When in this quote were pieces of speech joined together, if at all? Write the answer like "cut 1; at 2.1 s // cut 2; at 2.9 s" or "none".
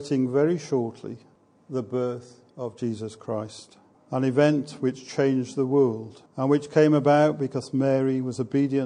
cut 1; at 6.3 s